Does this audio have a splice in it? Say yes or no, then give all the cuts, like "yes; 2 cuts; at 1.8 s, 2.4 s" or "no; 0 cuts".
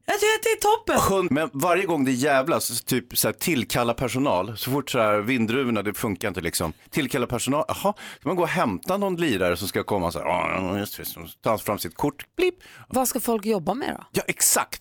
yes; 2 cuts; at 1.3 s, 12.9 s